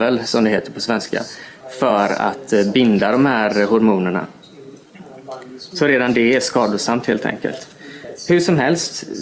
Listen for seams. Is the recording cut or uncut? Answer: uncut